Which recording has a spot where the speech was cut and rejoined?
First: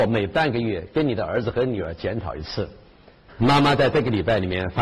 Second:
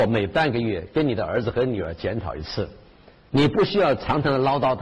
first; 1 cut; at 3.3 s

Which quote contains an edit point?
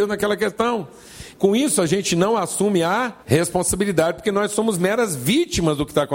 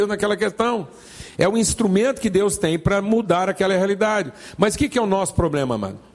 first; 2 cuts; at 1.3 s, 3.2 s

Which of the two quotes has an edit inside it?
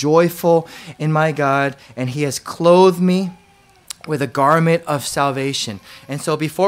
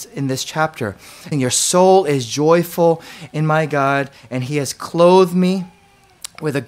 second; 1 cut; at 1.3 s

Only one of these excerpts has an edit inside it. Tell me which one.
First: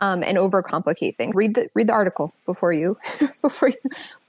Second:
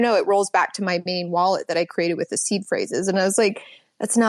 first; 1 cut; at 1.3 s

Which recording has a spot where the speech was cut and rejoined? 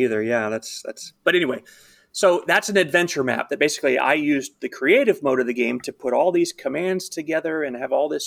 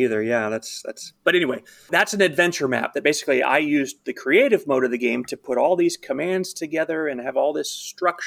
second; 1 cut; at 1.9 s

